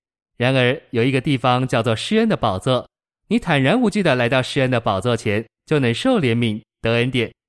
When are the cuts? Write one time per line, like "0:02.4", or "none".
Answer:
none